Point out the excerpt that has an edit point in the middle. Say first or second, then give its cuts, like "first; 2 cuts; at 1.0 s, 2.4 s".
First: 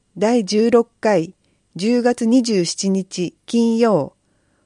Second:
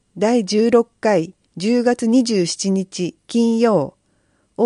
second; 1 cut; at 1.5 s